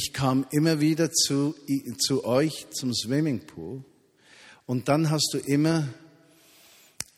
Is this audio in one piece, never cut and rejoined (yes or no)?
yes